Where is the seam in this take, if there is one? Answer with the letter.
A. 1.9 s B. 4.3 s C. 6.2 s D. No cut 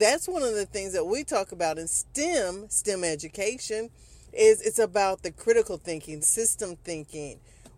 C